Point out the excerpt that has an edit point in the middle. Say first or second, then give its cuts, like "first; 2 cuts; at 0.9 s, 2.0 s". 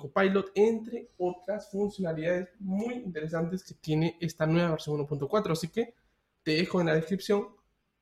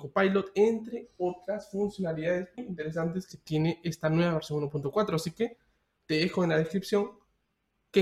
second; 1 cut; at 2.6 s